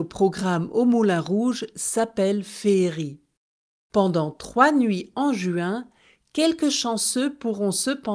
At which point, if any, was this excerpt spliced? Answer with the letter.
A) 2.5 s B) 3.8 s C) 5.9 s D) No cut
B